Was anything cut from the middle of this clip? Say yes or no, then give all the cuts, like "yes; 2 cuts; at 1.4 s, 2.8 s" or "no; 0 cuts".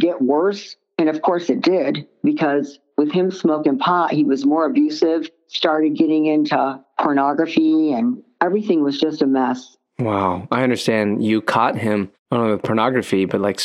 no; 0 cuts